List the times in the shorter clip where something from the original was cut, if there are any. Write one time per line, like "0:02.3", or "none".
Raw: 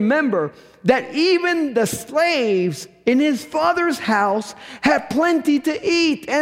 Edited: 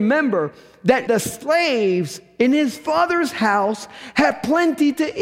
0:01.1